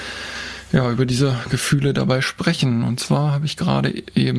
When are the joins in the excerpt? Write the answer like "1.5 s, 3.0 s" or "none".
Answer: none